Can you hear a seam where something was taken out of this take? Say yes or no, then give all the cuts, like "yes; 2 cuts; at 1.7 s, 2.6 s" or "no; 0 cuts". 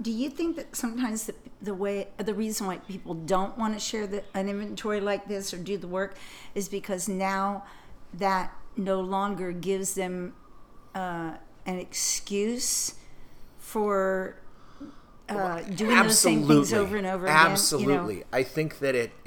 no; 0 cuts